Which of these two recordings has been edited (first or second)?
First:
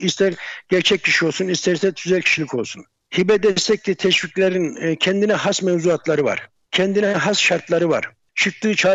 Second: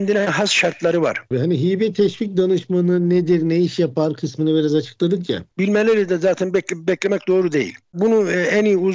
second